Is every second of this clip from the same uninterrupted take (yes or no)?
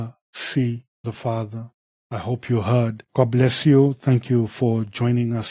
yes